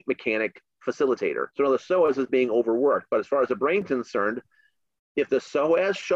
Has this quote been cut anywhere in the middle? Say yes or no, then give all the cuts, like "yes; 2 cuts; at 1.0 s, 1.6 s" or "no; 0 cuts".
yes; 1 cut; at 1.5 s